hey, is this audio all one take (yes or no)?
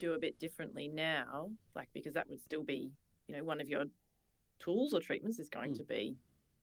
yes